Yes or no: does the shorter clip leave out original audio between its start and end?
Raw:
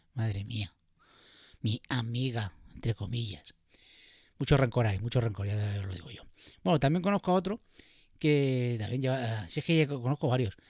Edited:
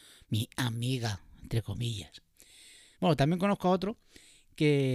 yes